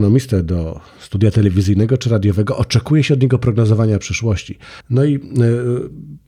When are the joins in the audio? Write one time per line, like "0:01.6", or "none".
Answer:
0:04.8